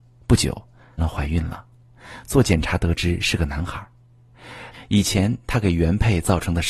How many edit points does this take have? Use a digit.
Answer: 2